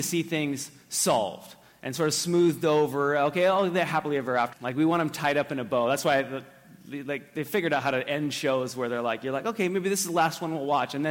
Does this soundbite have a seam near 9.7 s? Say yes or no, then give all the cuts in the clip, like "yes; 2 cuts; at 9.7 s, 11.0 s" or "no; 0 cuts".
no; 1 cut; at 4.5 s